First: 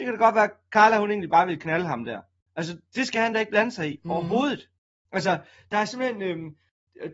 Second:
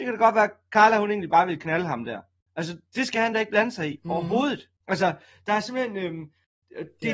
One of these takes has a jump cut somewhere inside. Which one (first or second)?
second